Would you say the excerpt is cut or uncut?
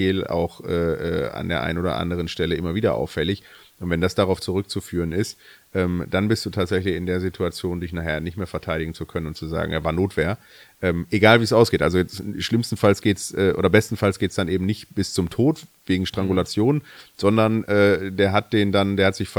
uncut